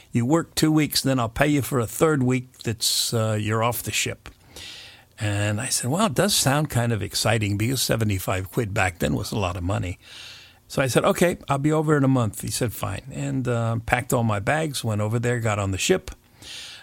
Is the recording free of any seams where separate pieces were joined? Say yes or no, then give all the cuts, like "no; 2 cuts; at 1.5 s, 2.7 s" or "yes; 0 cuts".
yes; 0 cuts